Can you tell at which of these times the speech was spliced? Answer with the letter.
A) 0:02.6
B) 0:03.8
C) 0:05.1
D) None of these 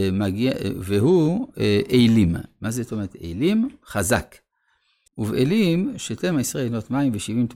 C